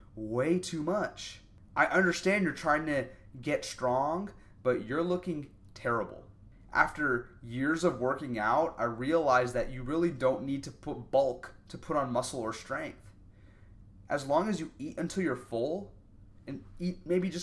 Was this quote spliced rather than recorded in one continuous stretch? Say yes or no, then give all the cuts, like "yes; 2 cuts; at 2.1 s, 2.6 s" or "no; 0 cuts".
no; 0 cuts